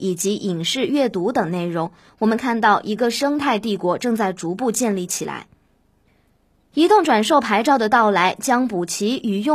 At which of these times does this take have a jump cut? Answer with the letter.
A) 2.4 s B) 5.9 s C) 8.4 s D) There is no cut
D